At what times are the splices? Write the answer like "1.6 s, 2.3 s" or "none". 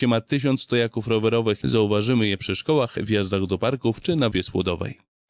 1.6 s, 4.3 s

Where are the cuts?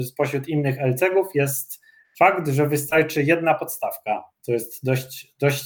none

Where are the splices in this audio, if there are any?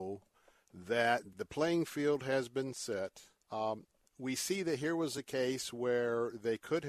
1.3 s, 3.4 s

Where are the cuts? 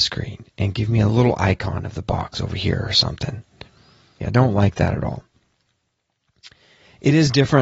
4.2 s

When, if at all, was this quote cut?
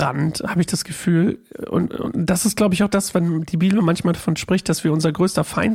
none

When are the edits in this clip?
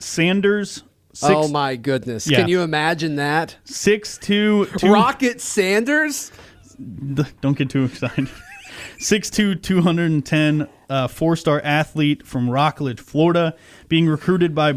none

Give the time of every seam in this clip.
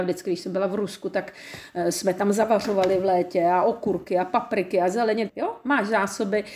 5.3 s

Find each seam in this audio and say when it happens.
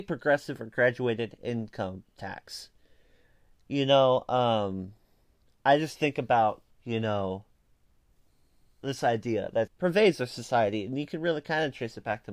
6.7 s, 9.7 s

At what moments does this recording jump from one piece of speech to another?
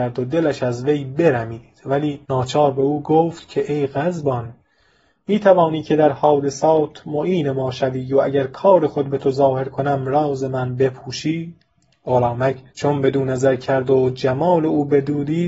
2.2 s, 12.7 s

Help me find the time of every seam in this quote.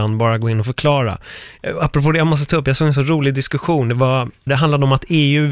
4.5 s

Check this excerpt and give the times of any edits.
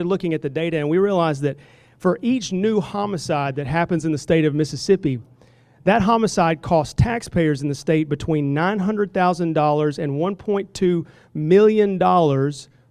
none

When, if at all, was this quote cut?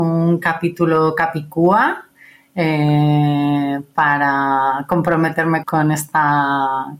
5.6 s

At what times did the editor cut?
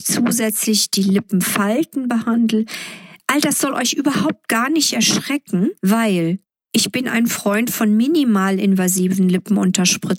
5.8 s

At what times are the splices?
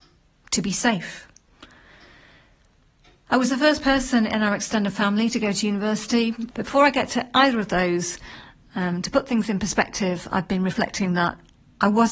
6.5 s

